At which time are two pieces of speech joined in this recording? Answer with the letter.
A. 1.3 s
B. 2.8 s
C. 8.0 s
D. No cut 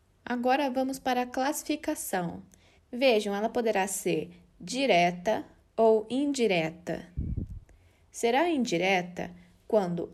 B